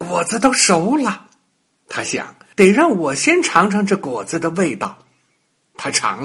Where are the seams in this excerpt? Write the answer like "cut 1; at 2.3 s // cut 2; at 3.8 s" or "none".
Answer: cut 1; at 2.5 s